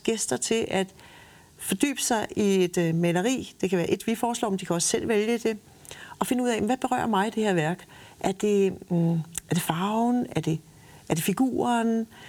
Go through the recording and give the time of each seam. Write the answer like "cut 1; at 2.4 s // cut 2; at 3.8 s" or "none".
none